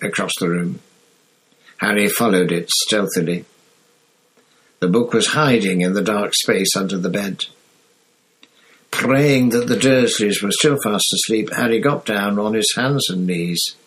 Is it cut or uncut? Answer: uncut